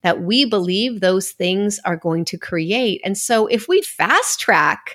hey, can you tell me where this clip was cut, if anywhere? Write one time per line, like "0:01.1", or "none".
0:03.8

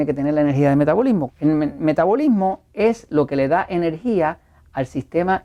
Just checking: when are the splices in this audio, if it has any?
0:01.3

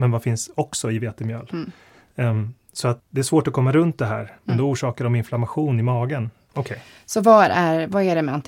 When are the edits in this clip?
0:03.0
0:04.4
0:06.5

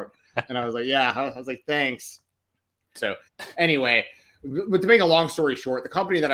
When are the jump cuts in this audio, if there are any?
0:02.9

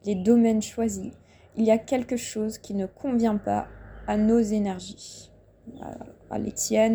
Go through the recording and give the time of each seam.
none

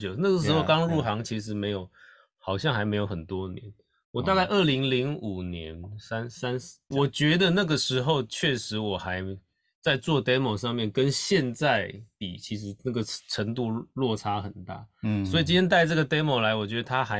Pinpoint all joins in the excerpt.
0:06.9

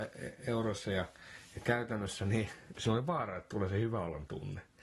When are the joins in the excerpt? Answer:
0:02.7

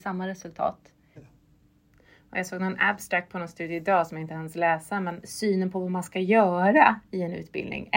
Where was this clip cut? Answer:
0:01.2
0:05.2

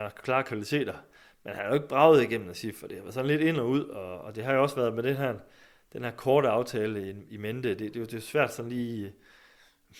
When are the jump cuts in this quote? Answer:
none

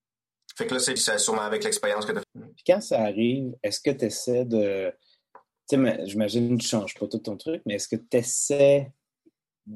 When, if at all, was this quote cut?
0:01.0
0:02.2

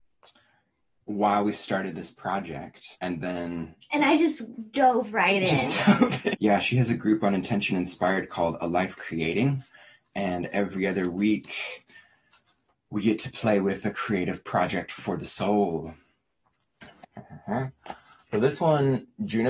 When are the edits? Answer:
0:02.9
0:06.3
0:17.0

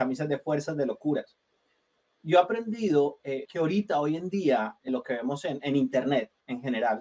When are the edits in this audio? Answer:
0:03.5
0:04.9

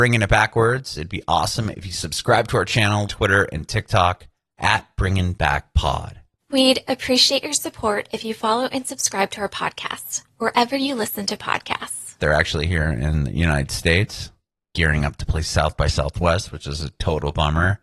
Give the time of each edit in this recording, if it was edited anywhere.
0:03.1
0:12.2

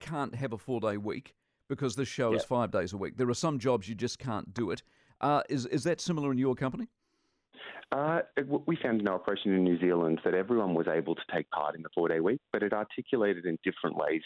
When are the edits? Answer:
none

